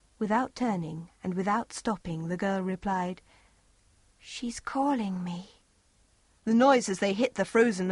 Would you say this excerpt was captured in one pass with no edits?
no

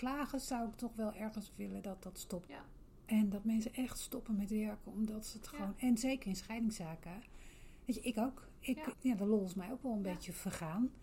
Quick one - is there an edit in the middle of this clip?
yes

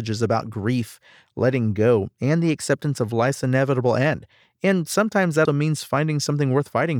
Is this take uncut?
no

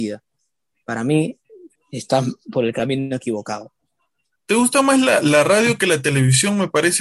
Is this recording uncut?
no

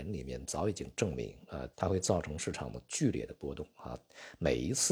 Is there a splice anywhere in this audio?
yes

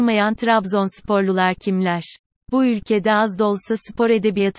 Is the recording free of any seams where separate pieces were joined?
yes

